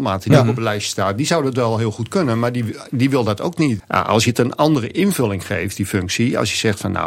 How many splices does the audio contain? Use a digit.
1